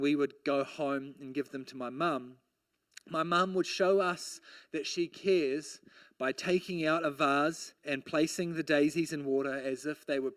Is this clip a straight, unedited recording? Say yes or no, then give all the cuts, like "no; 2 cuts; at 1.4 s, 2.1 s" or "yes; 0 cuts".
no; 1 cut; at 7.8 s